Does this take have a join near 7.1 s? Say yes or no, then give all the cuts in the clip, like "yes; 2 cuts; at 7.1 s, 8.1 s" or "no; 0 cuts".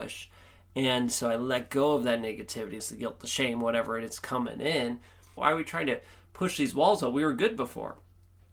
no; 2 cuts; at 2.8 s, 5.4 s